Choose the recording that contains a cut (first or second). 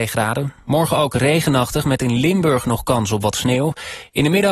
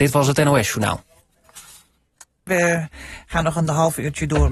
second